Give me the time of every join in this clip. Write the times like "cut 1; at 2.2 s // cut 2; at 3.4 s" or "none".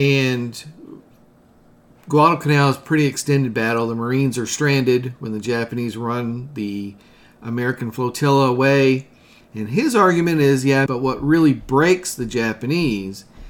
cut 1; at 9.4 s // cut 2; at 10.9 s